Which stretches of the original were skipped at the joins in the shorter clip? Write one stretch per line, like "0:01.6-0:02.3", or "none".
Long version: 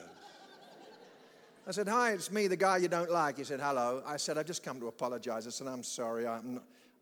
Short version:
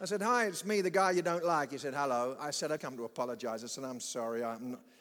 0:04.4-0:04.6

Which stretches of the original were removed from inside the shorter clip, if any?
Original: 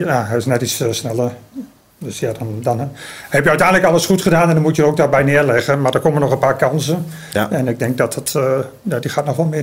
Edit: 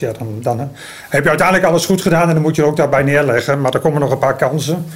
none

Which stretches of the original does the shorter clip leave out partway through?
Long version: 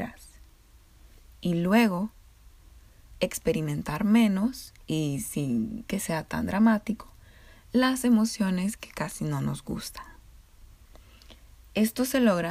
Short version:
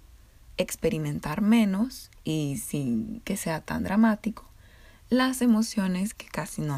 none

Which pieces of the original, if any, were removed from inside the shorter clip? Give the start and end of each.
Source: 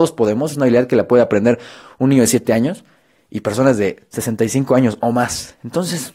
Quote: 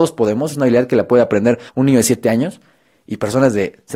0:01.7-0:01.9

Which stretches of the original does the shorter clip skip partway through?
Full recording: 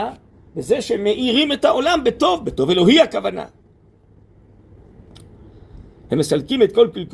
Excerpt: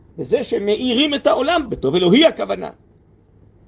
0:02.0-0:02.4

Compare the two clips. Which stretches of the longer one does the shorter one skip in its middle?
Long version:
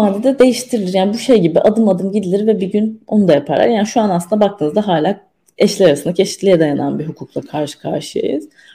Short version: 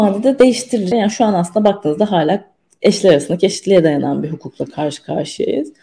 0:00.9-0:03.7

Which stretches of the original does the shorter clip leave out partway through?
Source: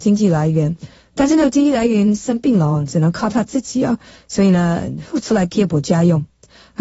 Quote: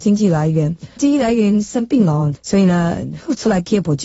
0:01.0-0:01.5
0:02.9-0:04.2

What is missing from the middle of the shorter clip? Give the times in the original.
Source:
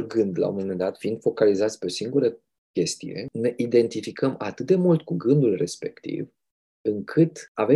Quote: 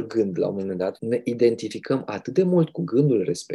0:01.0-0:03.3

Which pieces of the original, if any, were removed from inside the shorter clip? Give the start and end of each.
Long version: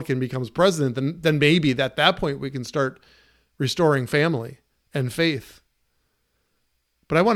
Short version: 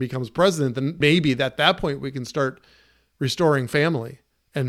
0:01.2-0:01.4

